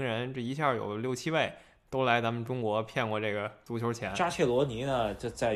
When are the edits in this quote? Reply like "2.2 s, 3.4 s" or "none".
none